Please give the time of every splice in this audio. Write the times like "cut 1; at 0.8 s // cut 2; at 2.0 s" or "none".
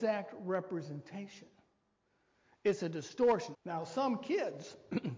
cut 1; at 3.5 s